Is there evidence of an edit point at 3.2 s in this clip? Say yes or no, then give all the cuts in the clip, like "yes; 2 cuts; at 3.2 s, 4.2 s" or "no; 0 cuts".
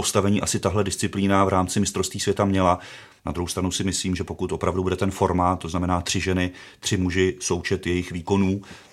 yes; 2 cuts; at 3.2 s, 5.6 s